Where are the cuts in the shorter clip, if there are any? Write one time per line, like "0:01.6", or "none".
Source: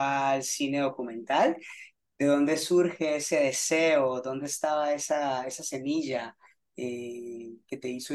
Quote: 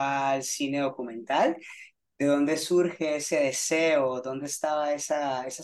none